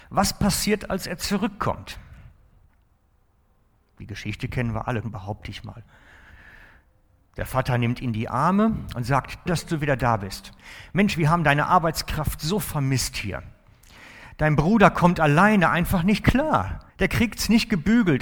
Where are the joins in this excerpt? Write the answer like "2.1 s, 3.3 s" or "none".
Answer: 5.0 s, 9.5 s, 16.9 s